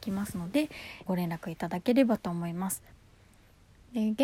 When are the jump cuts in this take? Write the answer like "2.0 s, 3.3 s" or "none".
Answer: 1.1 s